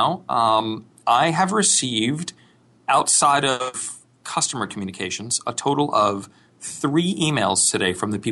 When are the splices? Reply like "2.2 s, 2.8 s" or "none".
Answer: none